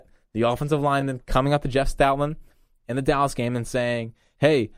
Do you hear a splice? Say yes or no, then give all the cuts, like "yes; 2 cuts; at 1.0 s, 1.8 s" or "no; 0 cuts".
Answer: no; 0 cuts